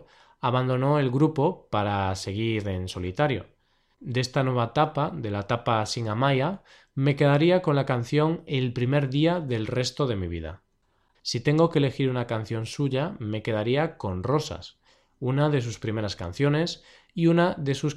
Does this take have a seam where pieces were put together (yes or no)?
yes